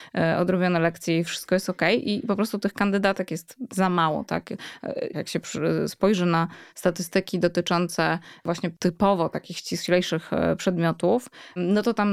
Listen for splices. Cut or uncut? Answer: cut